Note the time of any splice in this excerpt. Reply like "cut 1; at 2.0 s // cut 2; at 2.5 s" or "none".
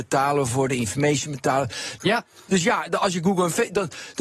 cut 1; at 2.0 s